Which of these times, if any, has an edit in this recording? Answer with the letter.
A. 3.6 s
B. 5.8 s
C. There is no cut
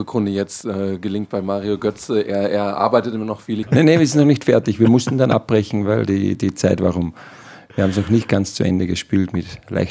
A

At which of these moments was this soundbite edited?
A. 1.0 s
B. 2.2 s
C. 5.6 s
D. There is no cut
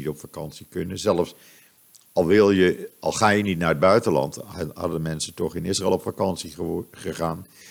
D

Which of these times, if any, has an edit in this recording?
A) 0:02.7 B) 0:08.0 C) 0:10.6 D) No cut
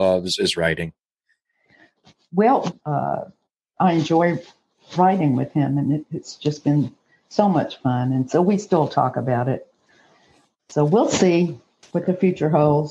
A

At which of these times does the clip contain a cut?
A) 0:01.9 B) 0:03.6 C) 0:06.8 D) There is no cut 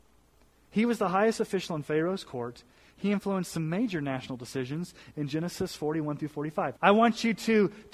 C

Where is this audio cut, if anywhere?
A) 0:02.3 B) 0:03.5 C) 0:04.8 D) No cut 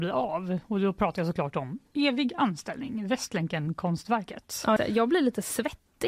C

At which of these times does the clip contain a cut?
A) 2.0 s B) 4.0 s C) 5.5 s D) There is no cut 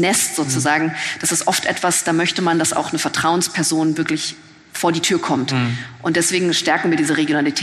D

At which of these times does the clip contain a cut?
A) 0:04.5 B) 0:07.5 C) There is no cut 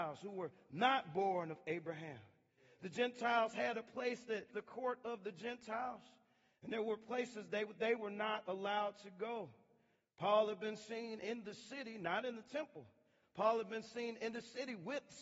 A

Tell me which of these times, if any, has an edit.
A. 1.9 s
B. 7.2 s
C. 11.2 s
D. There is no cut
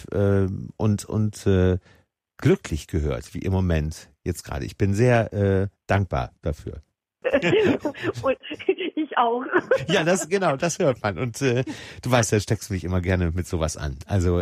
B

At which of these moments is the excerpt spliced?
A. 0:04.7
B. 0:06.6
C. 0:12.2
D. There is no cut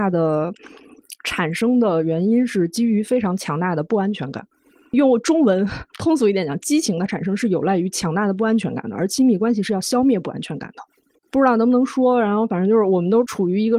D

